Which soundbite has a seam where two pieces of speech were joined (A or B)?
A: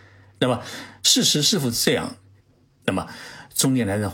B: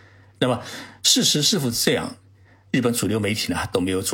A